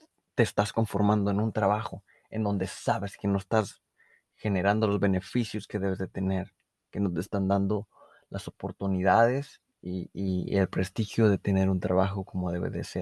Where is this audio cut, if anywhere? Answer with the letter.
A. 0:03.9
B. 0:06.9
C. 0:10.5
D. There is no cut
B